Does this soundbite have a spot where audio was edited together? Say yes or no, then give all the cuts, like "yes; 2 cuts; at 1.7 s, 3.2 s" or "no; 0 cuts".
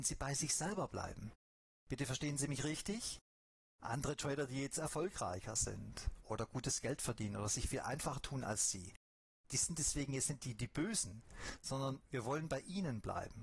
no; 0 cuts